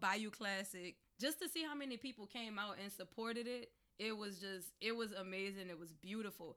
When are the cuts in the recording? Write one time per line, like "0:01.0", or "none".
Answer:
0:01.1